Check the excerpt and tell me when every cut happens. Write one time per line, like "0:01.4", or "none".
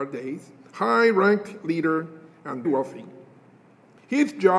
0:02.6